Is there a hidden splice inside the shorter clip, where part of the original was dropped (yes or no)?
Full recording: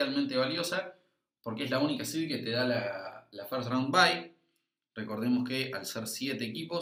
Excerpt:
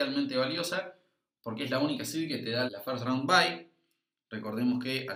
yes